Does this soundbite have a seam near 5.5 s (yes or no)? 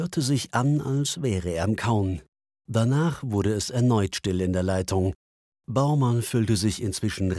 no